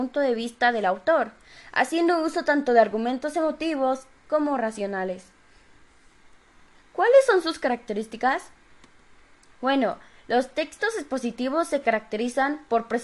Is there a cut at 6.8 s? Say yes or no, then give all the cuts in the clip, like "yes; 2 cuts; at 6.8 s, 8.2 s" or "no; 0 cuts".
yes; 1 cut; at 6.8 s